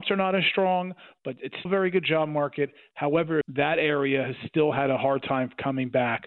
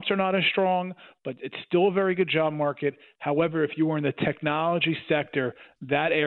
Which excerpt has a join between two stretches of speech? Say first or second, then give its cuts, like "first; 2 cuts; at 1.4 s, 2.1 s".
first; 2 cuts; at 1.7 s, 3.4 s